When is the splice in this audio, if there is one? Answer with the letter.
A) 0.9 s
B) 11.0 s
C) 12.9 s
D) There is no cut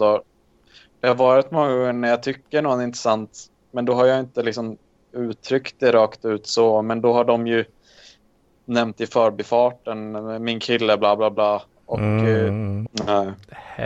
C